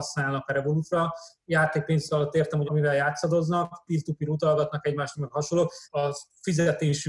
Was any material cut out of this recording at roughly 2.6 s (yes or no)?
yes